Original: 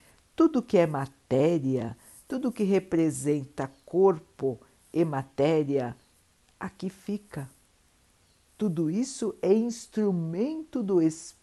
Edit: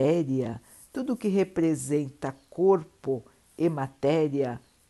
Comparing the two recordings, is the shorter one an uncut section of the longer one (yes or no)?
yes